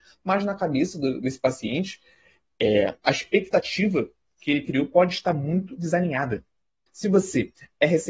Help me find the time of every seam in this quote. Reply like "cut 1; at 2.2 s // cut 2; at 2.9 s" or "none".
cut 1; at 6.9 s